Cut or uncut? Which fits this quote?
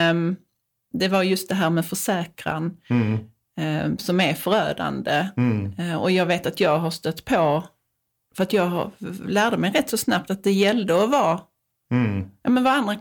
uncut